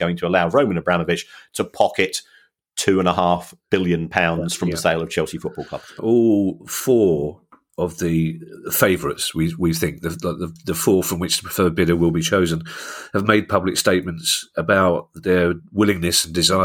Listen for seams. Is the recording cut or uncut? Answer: cut